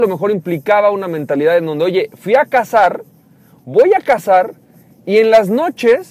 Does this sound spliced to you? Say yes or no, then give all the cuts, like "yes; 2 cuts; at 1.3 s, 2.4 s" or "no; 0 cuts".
no; 0 cuts